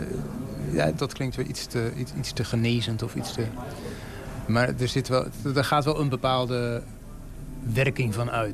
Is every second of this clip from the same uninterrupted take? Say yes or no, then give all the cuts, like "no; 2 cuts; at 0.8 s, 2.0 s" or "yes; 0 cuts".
no; 1 cut; at 1.0 s